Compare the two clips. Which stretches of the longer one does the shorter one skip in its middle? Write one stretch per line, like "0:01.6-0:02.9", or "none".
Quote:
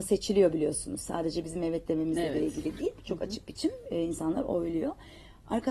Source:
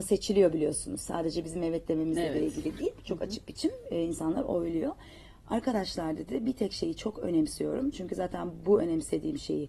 none

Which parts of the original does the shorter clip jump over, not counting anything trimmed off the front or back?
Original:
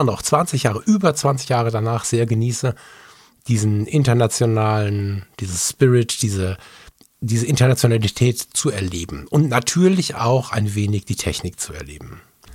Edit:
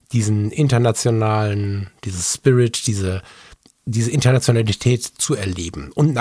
none

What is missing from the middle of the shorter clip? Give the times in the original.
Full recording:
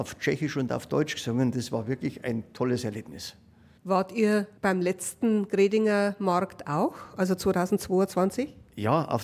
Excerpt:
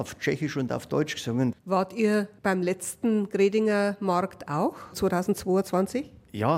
0:01.5-0:03.7
0:07.1-0:07.4

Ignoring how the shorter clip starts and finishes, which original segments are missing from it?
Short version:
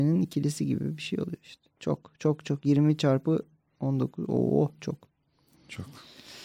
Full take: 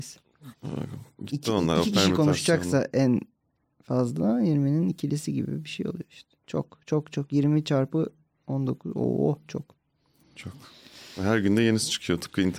none

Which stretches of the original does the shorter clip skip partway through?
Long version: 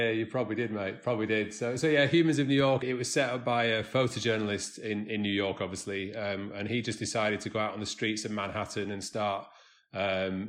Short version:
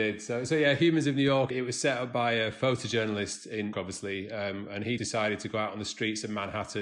0:05.0-0:05.6
0:06.8-0:07.0

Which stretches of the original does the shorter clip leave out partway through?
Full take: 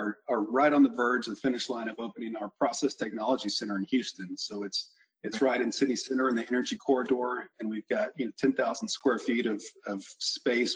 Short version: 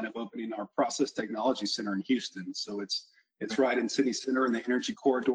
none

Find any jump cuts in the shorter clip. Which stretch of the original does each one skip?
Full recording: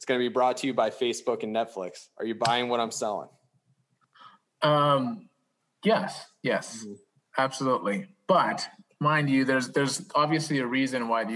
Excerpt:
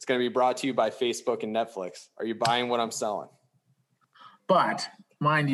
0:04.4-0:08.2

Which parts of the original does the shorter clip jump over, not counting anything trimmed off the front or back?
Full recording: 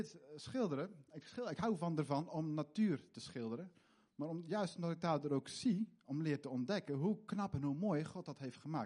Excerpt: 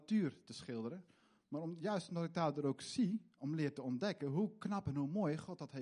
none

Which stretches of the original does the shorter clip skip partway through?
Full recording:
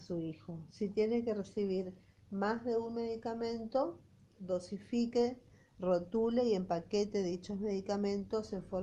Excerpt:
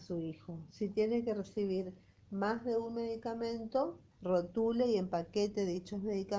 0:04.1-0:05.7

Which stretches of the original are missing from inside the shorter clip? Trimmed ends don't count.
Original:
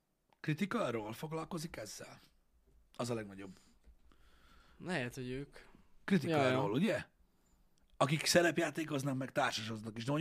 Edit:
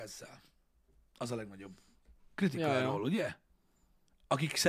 0:04.0-0:05.9

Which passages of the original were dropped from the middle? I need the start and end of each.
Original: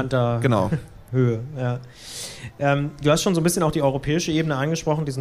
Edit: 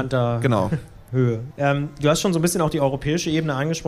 0:01.5-0:02.5

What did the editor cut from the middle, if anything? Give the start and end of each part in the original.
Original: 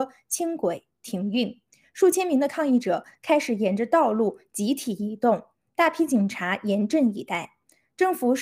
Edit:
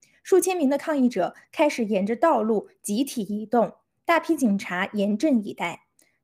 none

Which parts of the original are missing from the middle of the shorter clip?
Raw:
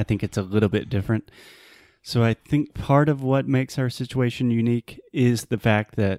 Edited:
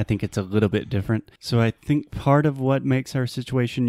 0:01.4-0:02.0

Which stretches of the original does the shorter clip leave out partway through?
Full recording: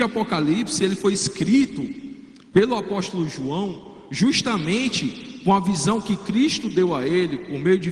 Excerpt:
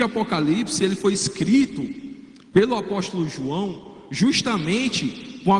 none

